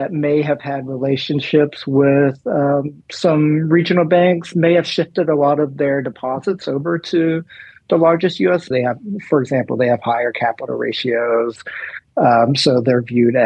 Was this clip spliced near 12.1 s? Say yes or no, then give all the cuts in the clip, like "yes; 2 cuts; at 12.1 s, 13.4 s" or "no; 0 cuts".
no; 2 cuts; at 3.0 s, 8.7 s